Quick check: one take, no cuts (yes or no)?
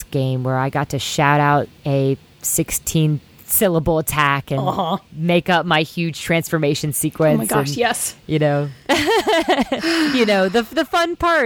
yes